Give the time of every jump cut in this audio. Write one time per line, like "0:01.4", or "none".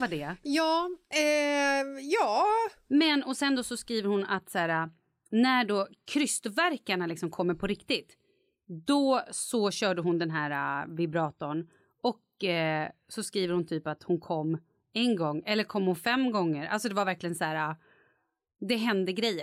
0:02.9